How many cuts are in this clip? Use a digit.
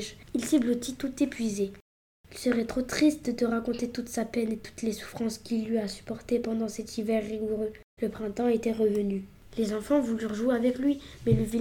2